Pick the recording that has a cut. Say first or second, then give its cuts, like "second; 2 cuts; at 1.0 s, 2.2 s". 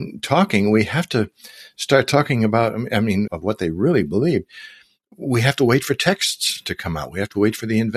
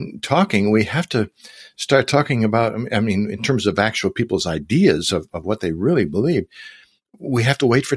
first; 1 cut; at 3.3 s